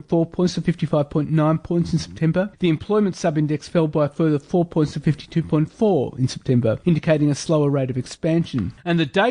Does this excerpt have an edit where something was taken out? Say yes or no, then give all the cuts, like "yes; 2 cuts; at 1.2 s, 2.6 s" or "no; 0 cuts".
no; 0 cuts